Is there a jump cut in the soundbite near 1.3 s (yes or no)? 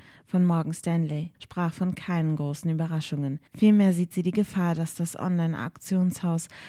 yes